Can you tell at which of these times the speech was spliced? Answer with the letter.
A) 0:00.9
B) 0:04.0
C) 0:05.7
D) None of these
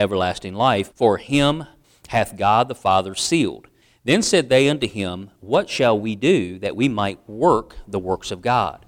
A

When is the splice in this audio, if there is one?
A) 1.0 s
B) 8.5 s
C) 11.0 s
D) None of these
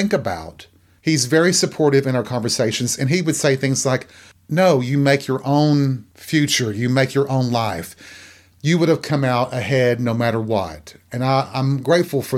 A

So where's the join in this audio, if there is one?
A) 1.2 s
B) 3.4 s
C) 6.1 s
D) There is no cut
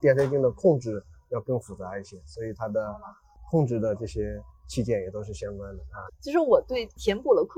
C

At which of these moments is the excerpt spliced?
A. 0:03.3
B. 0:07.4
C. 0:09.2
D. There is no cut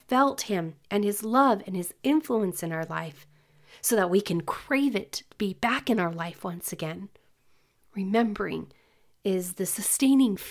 D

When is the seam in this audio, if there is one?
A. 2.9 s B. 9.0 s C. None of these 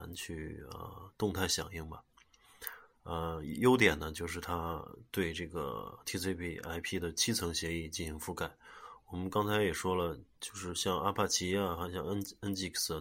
C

